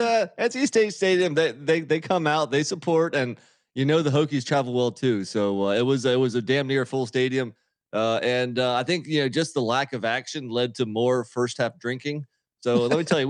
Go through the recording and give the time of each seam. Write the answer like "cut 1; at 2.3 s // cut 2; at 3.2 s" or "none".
none